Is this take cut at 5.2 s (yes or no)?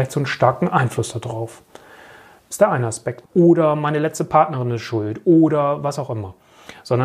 no